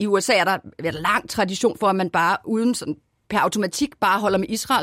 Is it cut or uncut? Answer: uncut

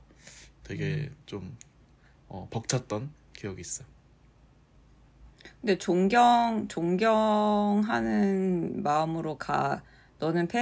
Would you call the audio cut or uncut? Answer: uncut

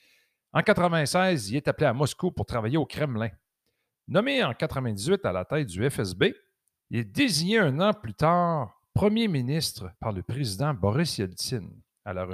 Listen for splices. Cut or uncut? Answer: cut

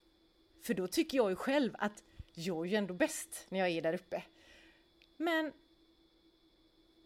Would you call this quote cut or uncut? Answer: uncut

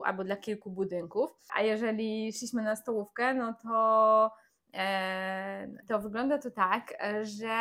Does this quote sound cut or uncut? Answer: cut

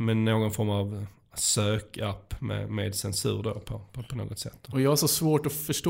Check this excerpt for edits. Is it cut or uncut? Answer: uncut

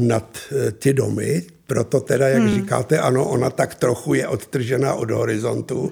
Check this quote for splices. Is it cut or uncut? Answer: uncut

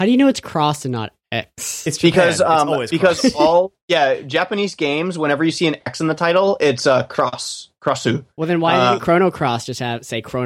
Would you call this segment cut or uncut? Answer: uncut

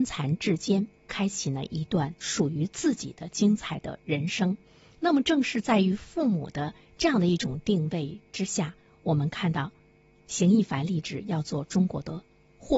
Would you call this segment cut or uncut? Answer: cut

